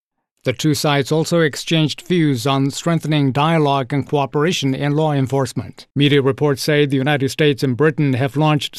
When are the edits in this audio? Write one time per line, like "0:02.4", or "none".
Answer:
0:05.9